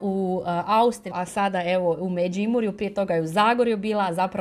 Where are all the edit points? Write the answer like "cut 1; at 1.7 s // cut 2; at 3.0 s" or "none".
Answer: cut 1; at 1.1 s